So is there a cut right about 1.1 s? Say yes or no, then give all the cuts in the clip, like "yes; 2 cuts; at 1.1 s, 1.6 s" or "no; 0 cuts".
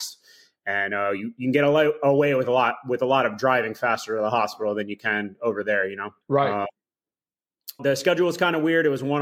no; 2 cuts; at 6.2 s, 7.8 s